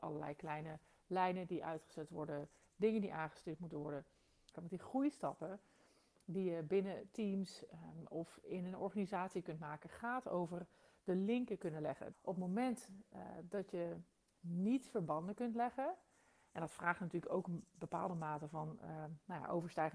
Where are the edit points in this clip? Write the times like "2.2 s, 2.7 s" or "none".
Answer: 4.5 s, 12.1 s